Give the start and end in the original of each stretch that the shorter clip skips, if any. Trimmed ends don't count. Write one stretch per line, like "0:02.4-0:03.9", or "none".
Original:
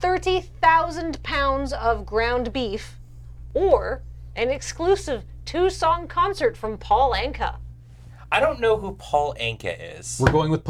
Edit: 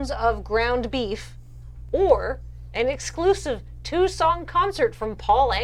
none